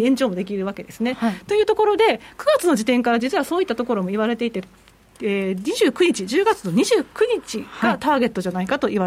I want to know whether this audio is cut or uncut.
uncut